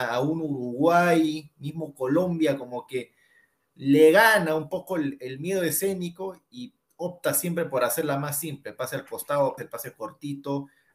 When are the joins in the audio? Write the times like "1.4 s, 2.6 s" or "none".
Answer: 9.6 s